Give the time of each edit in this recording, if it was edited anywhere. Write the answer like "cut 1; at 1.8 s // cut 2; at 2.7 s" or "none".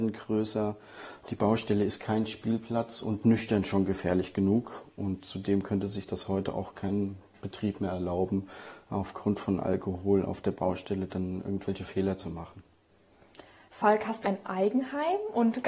cut 1; at 14.2 s